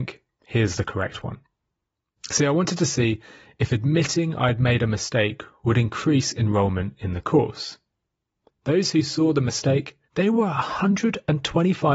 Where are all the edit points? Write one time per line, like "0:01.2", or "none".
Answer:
0:02.2
0:08.5
0:10.1